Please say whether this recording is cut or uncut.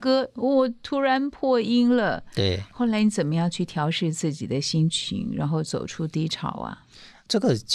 uncut